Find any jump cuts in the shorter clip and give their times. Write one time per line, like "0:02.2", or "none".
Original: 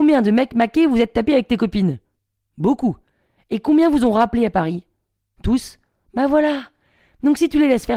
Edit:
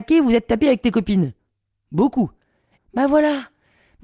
0:02.8